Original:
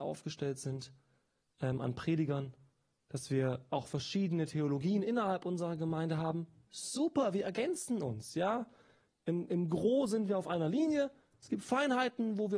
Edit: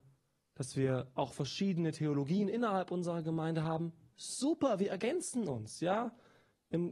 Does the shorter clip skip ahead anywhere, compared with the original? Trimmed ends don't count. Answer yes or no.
no